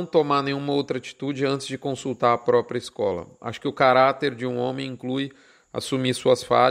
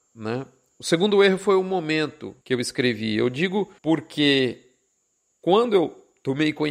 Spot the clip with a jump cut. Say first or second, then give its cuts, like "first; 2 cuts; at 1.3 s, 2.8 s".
second; 2 cuts; at 2.4 s, 3.8 s